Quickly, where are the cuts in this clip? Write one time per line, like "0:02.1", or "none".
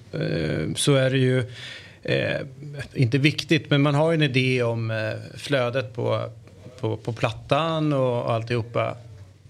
none